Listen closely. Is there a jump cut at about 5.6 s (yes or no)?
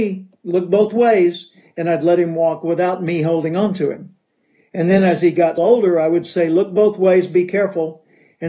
yes